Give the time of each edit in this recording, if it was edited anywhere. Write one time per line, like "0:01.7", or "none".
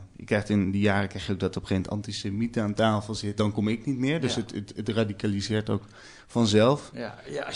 0:03.4